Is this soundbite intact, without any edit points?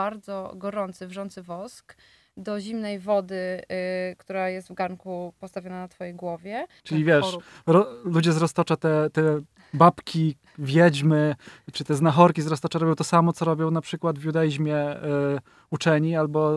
no; 1 cut; at 6.8 s

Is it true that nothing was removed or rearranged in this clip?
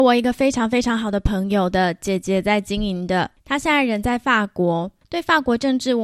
yes; 0 cuts

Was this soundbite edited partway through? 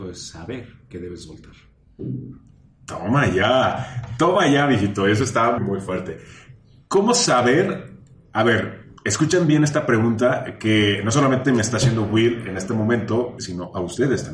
yes; 3 cuts; at 5.6 s, 9.0 s, 13.4 s

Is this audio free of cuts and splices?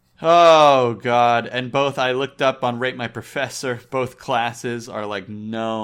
yes; 0 cuts

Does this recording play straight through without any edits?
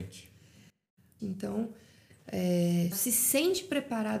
no; 2 cuts; at 1.2 s, 2.9 s

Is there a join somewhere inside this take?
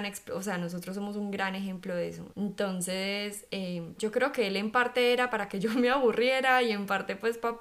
yes; 2 cuts; at 2.3 s, 4.0 s

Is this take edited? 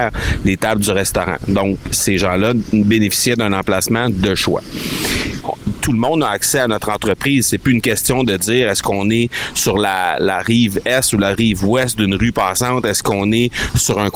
yes; 1 cut; at 5.4 s

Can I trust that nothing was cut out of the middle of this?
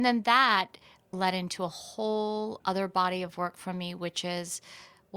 no; 1 cut; at 1.1 s

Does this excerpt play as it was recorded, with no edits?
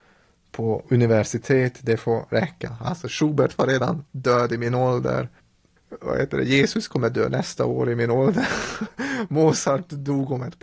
yes; 0 cuts

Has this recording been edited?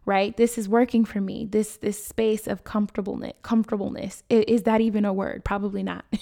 no; 0 cuts

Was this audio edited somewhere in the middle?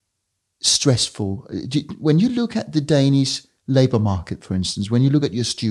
no; 0 cuts

